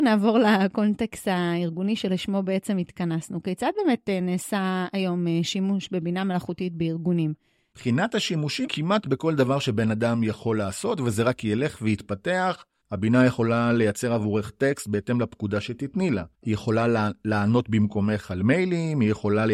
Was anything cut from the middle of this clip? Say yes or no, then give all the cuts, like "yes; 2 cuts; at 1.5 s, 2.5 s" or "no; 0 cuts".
yes; 1 cut; at 8.7 s